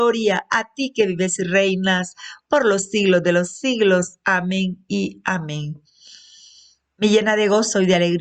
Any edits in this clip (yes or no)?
no